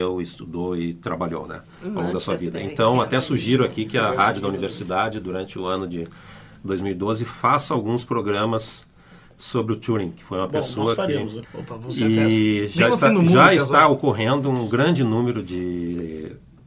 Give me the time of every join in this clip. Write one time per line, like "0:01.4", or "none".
0:11.4

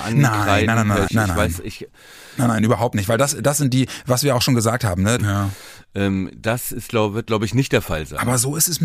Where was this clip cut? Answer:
0:01.1
0:05.2

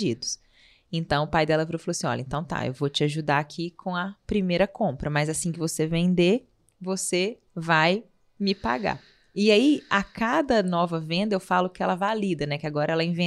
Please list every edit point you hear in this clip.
0:07.5

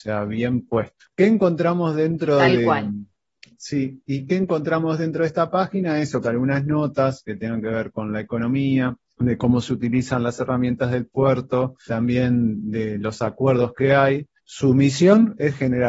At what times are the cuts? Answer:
0:06.2
0:14.4

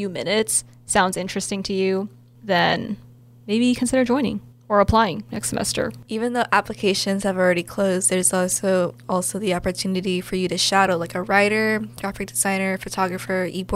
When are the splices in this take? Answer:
none

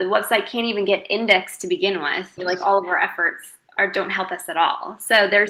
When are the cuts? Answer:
0:02.4

